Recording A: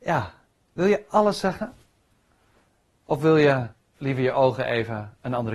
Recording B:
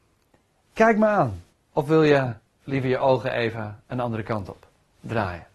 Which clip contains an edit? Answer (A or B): B